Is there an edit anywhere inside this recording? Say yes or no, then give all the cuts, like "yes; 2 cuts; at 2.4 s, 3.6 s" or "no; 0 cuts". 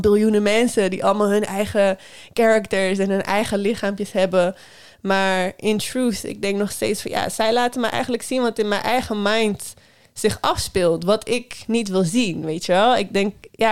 no; 0 cuts